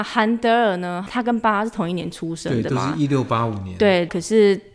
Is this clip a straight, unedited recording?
yes; 0 cuts

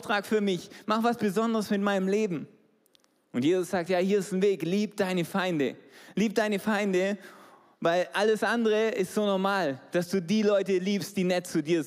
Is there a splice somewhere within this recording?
no; 0 cuts

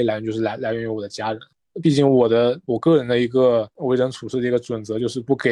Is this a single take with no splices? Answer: yes; 0 cuts

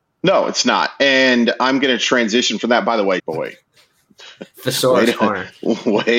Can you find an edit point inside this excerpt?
yes; 1 cut; at 3.2 s

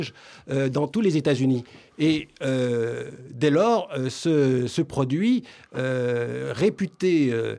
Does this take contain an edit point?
no; 0 cuts

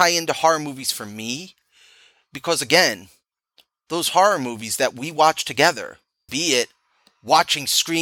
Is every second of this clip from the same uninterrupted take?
no; 1 cut; at 6.3 s

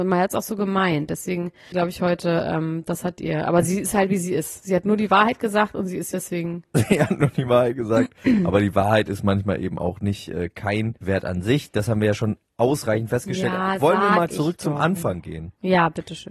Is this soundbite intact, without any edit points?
no; 3 cuts; at 1.7 s, 6.1 s, 11.0 s

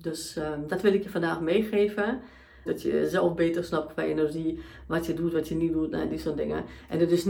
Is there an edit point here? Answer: yes; 1 cut; at 2.7 s

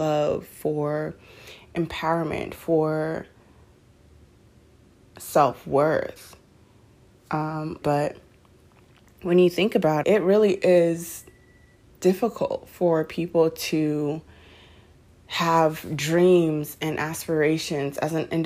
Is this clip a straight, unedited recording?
no; 2 cuts; at 7.8 s, 10.0 s

